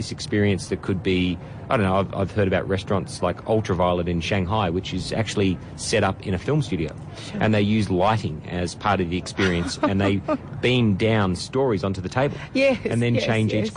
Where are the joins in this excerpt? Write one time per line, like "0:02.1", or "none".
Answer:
none